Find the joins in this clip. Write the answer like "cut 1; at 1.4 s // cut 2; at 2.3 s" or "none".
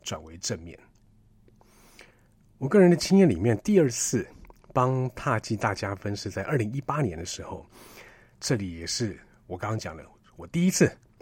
cut 1; at 8.3 s